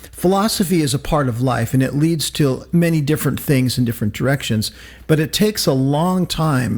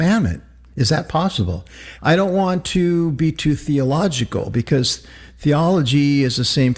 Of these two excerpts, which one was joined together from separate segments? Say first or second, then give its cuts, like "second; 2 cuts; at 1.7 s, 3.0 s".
second; 1 cut; at 2.0 s